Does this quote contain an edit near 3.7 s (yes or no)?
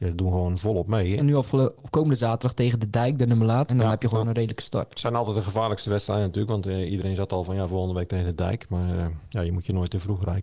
yes